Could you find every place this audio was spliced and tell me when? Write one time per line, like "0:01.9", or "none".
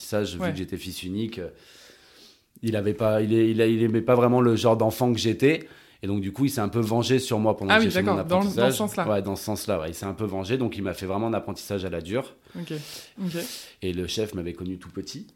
0:13.2